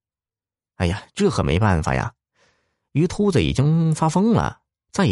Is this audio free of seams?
no; 1 cut; at 1.1 s

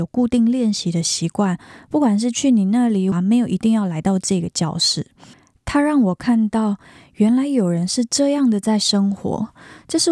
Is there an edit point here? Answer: yes; 1 cut; at 3.1 s

